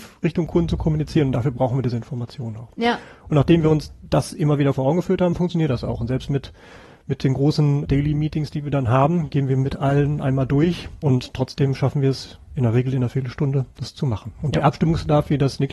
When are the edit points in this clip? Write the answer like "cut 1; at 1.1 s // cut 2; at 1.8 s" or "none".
none